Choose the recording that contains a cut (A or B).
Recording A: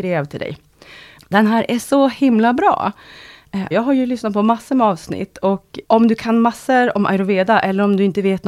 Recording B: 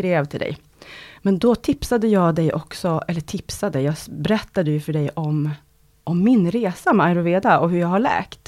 A